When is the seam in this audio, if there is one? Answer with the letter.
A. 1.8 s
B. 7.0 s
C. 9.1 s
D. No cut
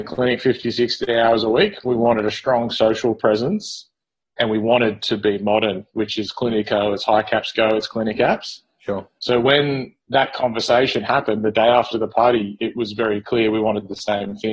D